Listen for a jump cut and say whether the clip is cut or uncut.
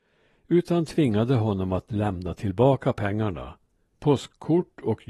cut